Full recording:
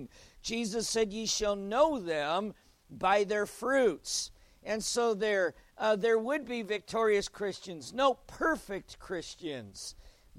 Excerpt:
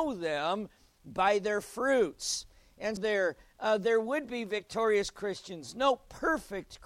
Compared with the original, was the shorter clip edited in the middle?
yes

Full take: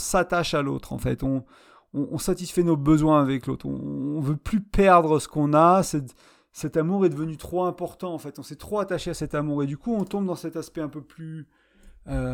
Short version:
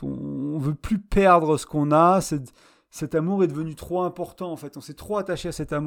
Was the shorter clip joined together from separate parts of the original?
no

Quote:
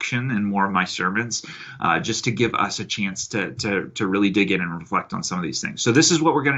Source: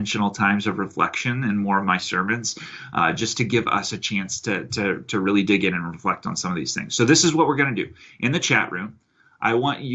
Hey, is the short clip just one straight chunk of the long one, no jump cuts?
yes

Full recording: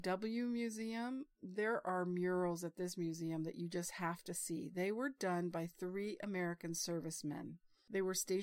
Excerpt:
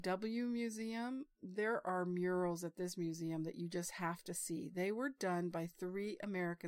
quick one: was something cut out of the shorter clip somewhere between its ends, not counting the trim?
no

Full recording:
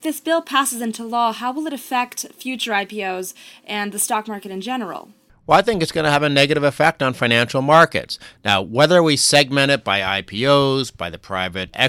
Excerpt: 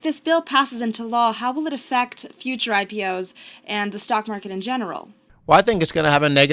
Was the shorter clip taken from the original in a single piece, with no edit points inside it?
yes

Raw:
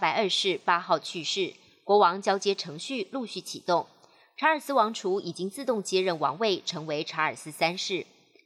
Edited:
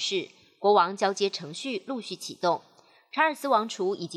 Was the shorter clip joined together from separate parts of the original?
no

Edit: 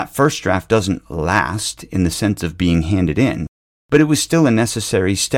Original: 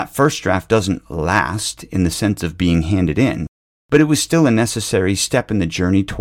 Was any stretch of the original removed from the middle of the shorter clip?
no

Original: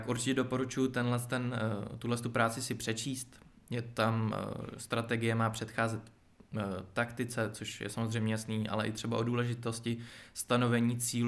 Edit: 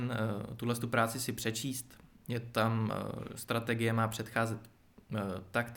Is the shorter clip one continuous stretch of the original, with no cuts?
yes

